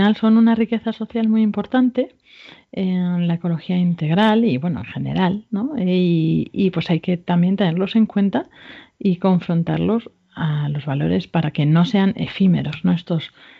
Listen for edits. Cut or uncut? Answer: uncut